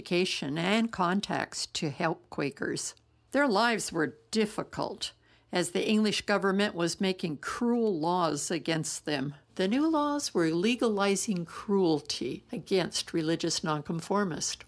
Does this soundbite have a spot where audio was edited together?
yes; 1 cut; at 9.5 s

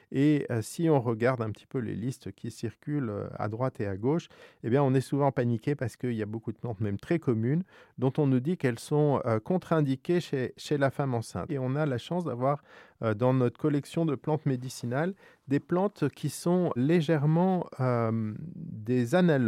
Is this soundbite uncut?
no; 2 cuts; at 11.5 s, 16.8 s

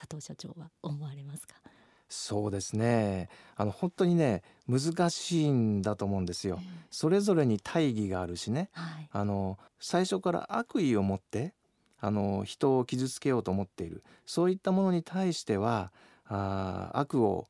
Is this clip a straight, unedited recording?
yes; 0 cuts

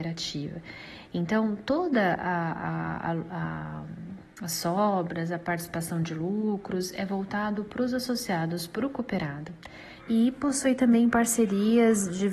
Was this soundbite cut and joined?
yes; 1 cut; at 10.0 s

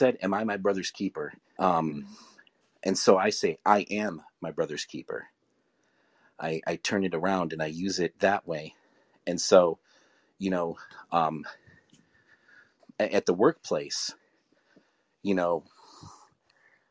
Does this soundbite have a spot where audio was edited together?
yes; 2 cuts; at 1.6 s, 12.8 s

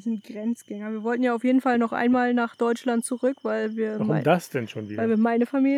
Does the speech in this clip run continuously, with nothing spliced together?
yes; 0 cuts

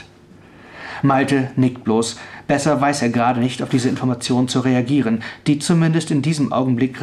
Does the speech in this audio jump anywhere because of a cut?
no; 0 cuts

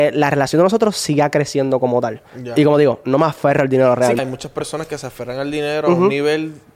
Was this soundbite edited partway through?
yes; 1 cut; at 4.2 s

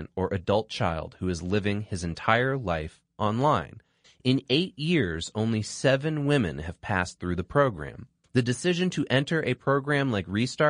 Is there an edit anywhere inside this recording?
yes; 2 cuts; at 4.0 s, 8.2 s

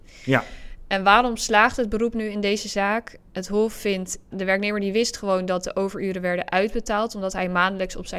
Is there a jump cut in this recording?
yes; 1 cut; at 4.3 s

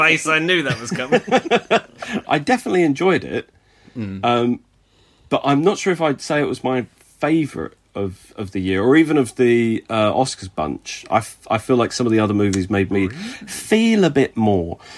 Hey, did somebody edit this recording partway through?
yes; 1 cut; at 2.2 s

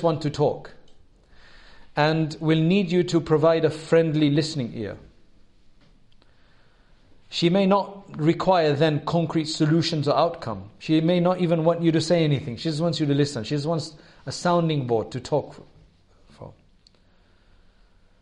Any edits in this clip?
no; 0 cuts

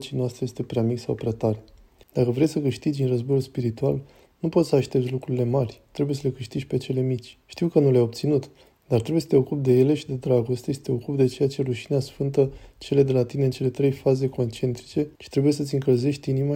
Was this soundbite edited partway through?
yes; 3 cuts; at 2.0 s, 7.4 s, 15.2 s

